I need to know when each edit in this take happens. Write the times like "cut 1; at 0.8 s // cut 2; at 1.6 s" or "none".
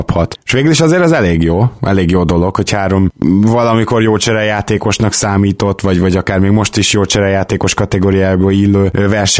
none